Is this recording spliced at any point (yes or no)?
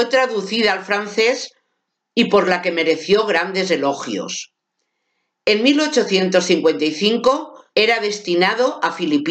yes